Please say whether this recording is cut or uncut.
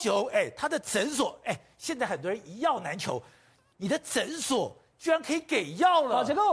uncut